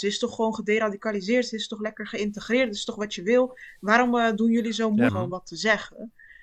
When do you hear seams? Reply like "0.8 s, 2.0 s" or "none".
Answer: 5.1 s